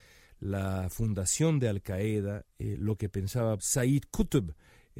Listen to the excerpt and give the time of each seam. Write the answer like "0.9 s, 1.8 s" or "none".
2.4 s, 3.6 s